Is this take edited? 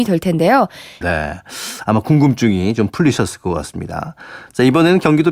yes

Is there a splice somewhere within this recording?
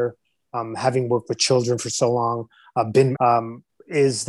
yes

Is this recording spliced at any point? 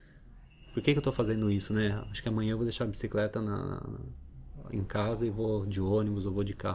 no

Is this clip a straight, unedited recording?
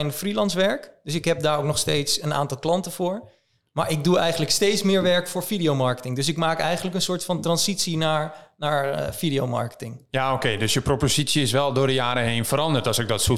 yes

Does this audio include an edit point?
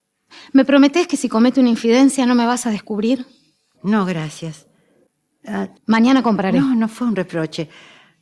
yes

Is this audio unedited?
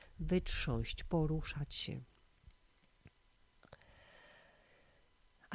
yes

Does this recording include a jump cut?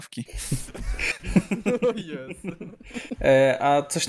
yes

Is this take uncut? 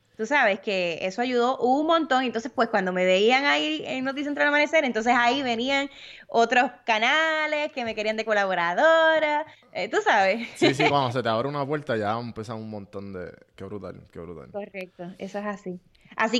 yes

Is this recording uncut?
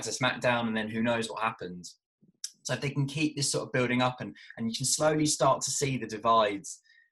yes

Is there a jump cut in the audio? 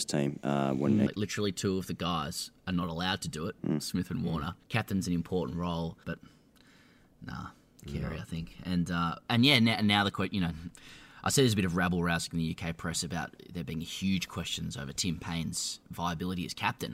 yes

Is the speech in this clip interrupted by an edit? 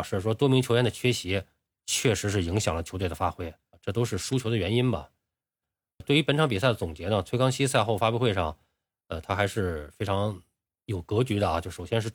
yes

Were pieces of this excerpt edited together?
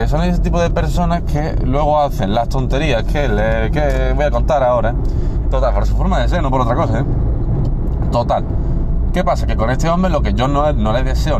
yes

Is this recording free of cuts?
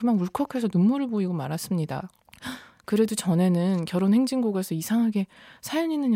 yes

